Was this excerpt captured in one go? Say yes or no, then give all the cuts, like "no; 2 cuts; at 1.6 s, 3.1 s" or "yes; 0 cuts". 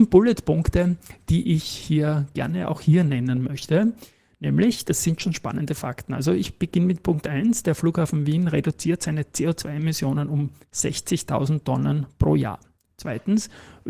yes; 0 cuts